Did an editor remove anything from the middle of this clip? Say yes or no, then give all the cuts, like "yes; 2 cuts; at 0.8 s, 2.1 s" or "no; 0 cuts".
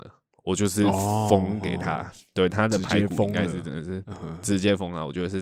no; 0 cuts